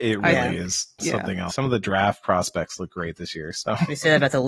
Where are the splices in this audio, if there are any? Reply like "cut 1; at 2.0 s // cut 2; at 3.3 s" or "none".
cut 1; at 1.5 s

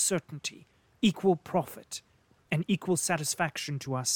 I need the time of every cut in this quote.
none

